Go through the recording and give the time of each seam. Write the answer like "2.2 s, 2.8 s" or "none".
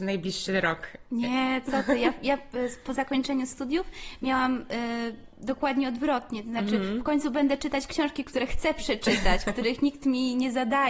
none